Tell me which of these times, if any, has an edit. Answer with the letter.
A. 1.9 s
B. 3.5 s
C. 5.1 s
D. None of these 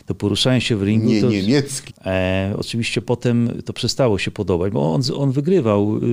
A